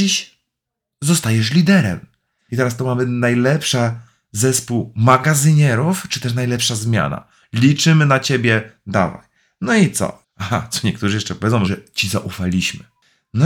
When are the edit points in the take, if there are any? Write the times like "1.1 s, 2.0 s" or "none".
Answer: 2.5 s, 10.2 s, 11.7 s